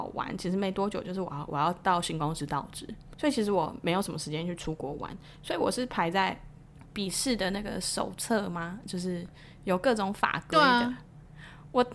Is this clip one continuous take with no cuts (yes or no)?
no